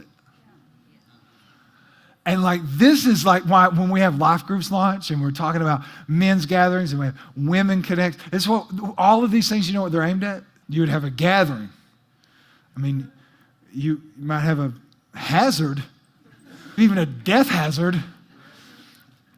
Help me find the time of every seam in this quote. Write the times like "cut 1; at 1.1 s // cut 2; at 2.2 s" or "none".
cut 1; at 10.6 s // cut 2; at 16.8 s